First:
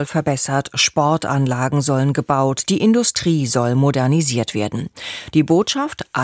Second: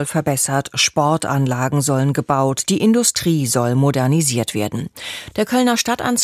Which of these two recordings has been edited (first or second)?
second